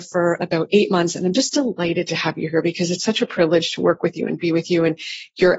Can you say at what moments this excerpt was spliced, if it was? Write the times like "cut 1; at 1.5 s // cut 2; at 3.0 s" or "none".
none